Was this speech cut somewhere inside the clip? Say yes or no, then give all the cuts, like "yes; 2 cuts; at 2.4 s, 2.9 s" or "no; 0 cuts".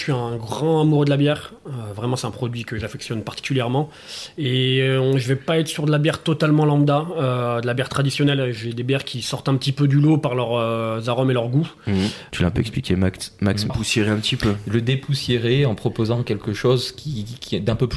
yes; 2 cuts; at 12.3 s, 13.7 s